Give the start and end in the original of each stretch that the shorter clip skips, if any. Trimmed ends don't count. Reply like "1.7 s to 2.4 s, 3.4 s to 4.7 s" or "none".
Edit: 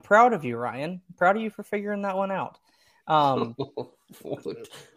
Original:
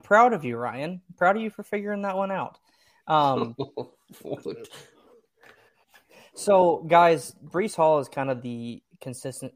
none